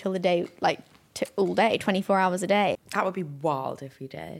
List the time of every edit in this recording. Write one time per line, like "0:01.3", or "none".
0:02.7